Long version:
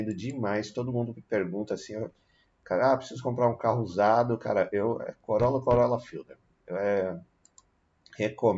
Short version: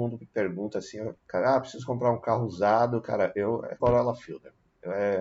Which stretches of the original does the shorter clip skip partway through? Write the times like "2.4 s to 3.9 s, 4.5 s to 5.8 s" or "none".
2.1 s to 2.5 s, 5.2 s to 5.6 s